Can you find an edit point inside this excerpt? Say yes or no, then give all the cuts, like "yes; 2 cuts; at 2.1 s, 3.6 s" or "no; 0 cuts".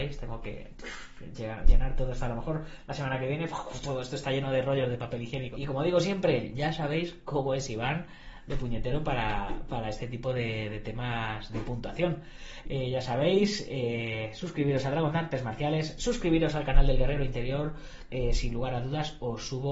yes; 3 cuts; at 5.5 s, 12.6 s, 18.1 s